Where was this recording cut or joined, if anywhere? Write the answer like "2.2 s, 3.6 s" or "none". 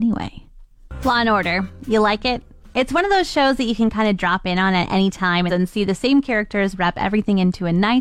5.5 s